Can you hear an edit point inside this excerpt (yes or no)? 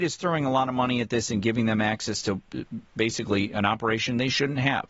no